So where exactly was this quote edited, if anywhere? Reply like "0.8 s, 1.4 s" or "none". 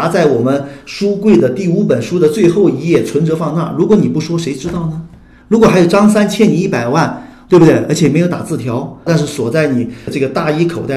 9.1 s